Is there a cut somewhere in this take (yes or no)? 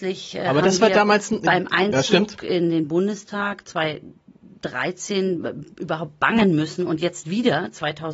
no